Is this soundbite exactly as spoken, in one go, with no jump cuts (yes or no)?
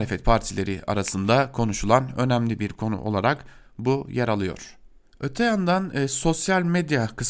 yes